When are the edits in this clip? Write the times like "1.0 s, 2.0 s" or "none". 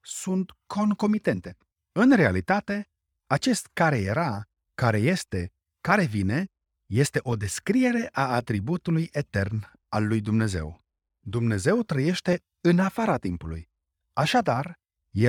1.7 s